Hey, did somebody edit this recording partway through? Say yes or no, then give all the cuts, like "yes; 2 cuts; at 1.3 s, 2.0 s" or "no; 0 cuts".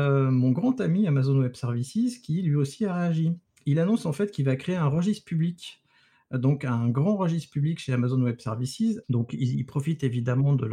yes; 1 cut; at 9.0 s